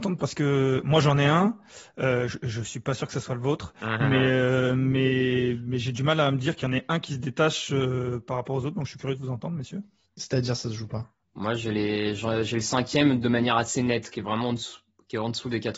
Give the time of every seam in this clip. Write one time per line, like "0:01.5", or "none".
0:10.0